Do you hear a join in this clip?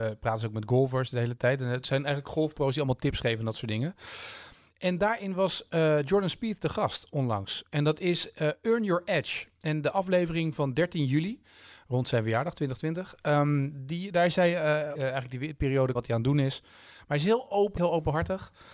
yes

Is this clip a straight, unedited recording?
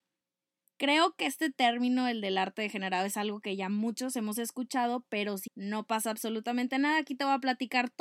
no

